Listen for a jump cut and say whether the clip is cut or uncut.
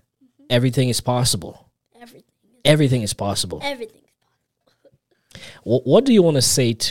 uncut